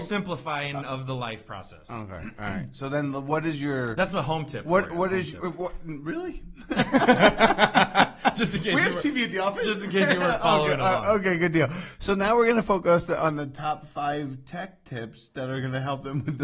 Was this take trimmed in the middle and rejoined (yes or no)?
no